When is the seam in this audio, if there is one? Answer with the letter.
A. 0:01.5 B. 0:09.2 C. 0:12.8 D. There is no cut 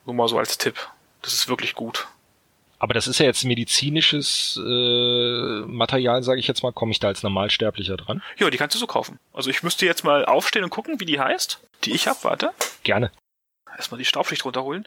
C